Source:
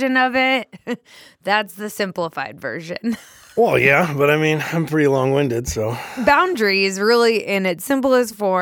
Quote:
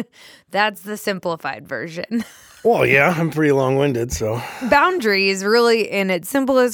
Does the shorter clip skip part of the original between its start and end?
yes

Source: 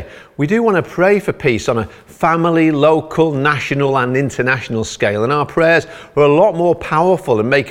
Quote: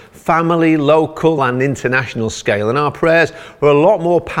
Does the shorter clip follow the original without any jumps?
no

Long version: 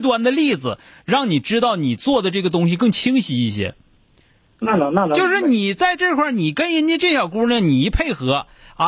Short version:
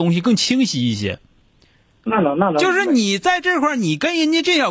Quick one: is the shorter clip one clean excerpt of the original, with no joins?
yes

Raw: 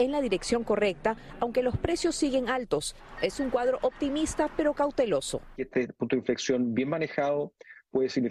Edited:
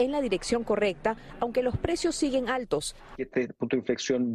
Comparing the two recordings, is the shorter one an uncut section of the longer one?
no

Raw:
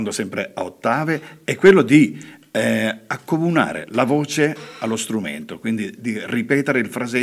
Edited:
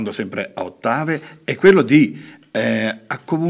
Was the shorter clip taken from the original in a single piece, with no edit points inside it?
yes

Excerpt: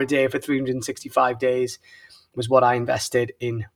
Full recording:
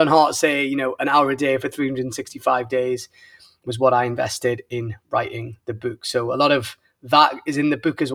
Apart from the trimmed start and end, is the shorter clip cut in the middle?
no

